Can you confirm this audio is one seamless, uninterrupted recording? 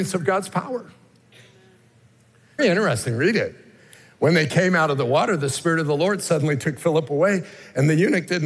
no; 1 cut; at 2.6 s

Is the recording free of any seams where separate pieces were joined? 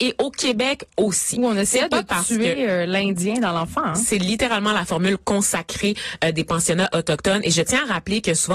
yes; 0 cuts

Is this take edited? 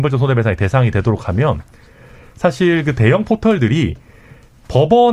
no; 0 cuts

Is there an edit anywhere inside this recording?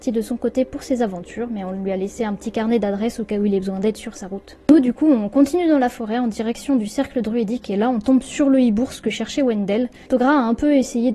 yes; 1 cut; at 10.0 s

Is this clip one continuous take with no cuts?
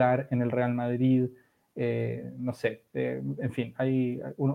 yes; 0 cuts

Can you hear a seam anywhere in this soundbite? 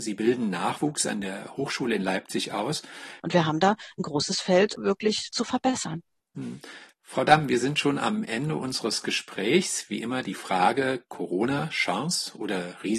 yes; 1 cut; at 3.2 s

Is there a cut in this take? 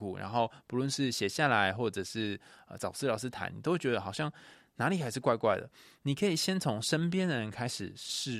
no; 0 cuts

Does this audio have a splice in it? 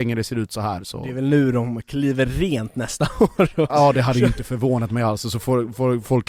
yes; 1 cut; at 3.7 s

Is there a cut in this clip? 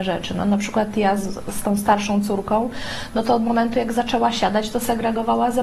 no; 0 cuts

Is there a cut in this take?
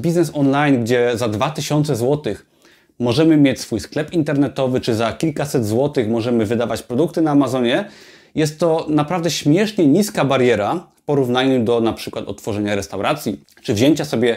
no; 0 cuts

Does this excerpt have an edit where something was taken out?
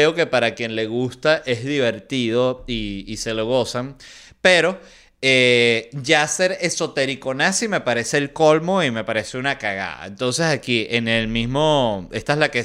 no; 0 cuts

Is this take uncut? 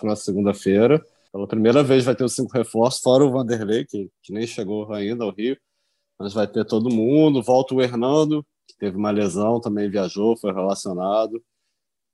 no; 2 cuts; at 1.3 s, 8.7 s

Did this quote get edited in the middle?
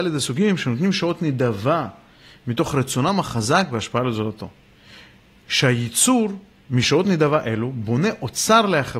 no; 0 cuts

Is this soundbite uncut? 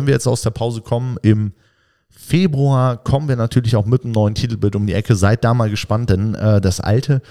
yes; 0 cuts

